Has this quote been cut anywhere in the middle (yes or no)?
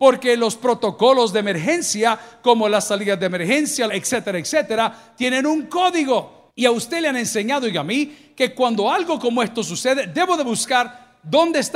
yes